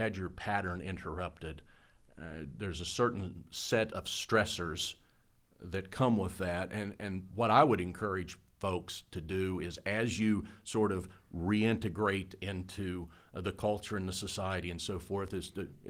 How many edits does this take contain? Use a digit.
0